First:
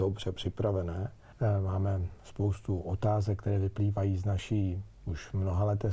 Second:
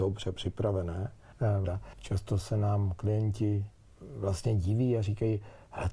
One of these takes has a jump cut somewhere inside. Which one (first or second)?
second